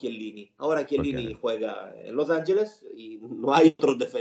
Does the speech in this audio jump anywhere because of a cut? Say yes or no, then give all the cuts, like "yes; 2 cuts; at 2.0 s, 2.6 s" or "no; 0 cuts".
no; 0 cuts